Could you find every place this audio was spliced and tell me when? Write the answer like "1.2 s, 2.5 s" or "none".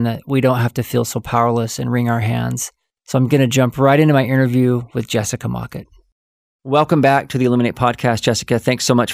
none